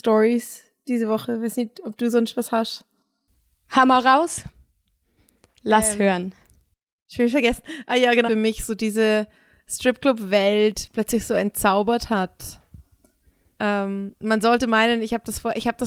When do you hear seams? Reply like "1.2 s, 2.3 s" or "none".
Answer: 8.3 s

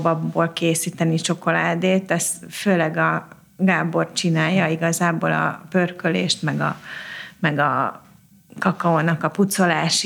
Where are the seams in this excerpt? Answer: none

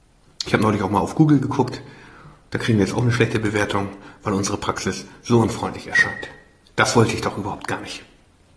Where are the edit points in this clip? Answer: 6.6 s

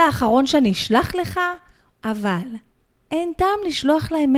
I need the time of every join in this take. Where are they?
1.9 s

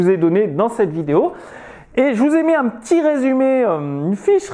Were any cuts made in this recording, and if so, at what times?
none

